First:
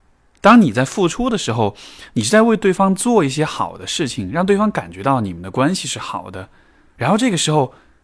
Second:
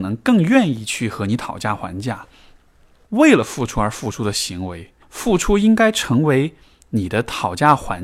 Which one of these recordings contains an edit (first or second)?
second